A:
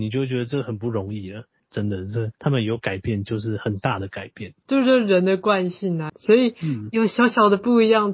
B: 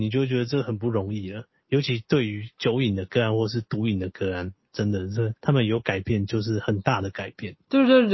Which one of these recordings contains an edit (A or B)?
A